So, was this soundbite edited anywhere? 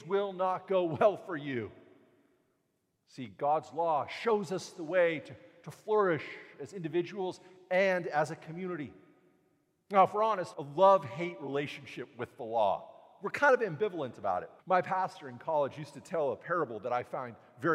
yes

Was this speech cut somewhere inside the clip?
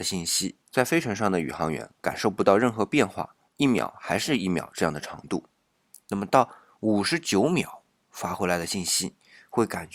no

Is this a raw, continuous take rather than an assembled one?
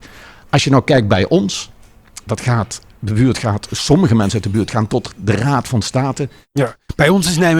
yes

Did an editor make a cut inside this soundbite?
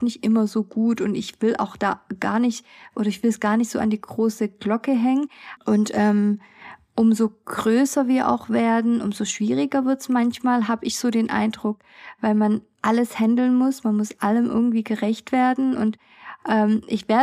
yes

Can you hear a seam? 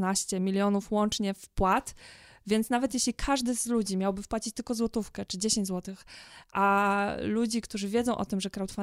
no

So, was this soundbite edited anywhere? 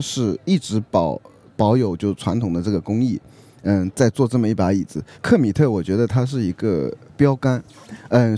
yes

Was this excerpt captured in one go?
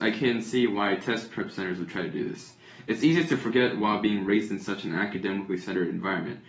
yes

